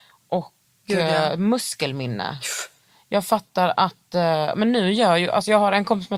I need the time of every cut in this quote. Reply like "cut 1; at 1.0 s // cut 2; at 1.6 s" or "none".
none